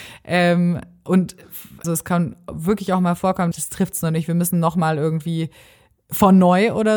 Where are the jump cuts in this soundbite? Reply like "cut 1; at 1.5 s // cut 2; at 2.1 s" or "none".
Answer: cut 1; at 1.8 s // cut 2; at 3.5 s

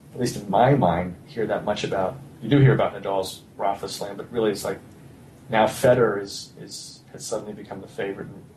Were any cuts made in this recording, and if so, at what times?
none

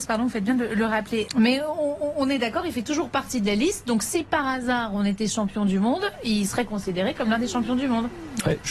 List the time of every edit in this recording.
cut 1; at 1.3 s

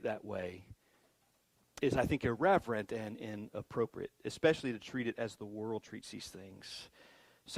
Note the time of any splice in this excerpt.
none

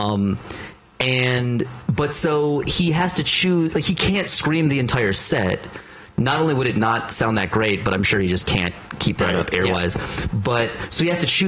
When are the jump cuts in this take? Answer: none

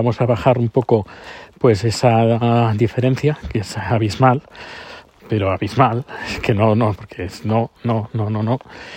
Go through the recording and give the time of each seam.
cut 1; at 5.2 s // cut 2; at 7.0 s

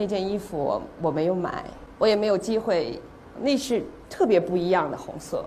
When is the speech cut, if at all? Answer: cut 1; at 1.9 s // cut 2; at 3.4 s

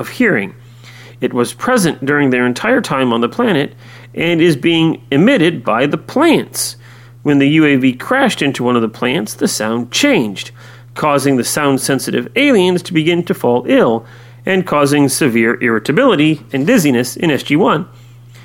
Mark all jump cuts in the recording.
cut 1; at 16.5 s

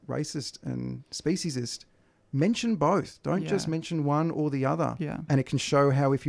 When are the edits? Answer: cut 1; at 5.3 s

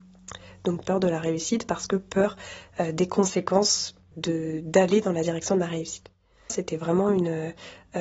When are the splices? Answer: cut 1; at 4.1 s // cut 2; at 6.5 s

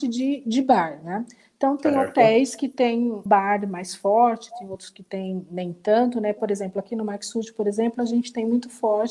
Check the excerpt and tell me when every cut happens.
cut 1; at 3.3 s

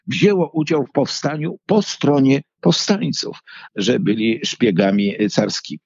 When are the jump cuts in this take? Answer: cut 1; at 3.7 s

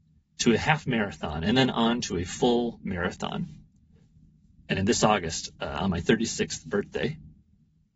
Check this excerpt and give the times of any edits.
none

